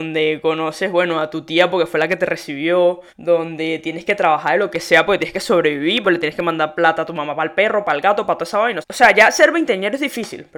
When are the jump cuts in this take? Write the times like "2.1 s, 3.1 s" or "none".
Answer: 3.1 s, 6.0 s, 8.8 s